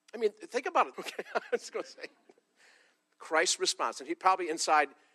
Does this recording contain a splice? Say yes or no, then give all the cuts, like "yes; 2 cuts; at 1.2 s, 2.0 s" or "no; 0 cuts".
yes; 1 cut; at 0.9 s